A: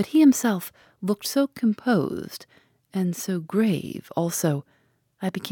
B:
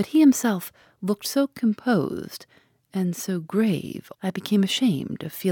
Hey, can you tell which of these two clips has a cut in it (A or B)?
B